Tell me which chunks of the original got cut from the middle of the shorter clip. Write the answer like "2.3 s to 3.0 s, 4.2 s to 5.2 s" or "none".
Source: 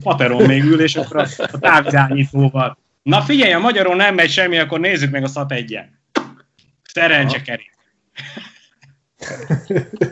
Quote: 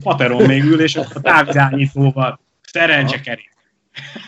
1.1 s to 1.5 s, 3.0 s to 6.8 s